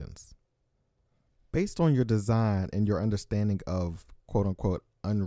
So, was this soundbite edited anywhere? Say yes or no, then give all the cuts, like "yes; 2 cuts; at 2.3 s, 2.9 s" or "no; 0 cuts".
no; 0 cuts